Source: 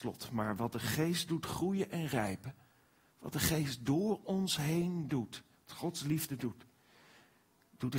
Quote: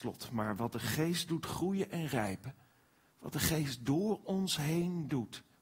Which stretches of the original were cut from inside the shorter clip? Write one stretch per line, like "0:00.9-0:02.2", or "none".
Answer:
none